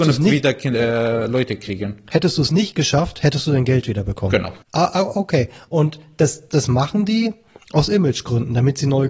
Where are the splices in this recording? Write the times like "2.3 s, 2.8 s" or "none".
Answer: 4.6 s, 6.5 s